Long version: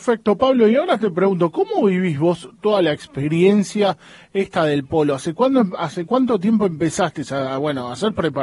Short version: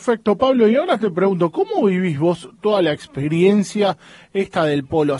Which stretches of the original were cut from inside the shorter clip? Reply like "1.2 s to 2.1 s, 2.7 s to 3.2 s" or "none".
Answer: none